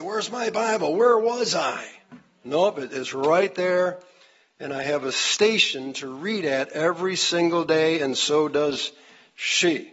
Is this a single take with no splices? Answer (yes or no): yes